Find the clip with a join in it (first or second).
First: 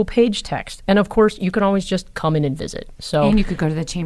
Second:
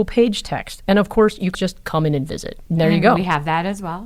second